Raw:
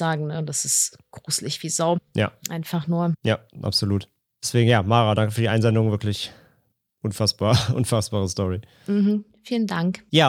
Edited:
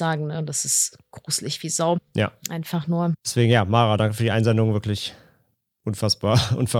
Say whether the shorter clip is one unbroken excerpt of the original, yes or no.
no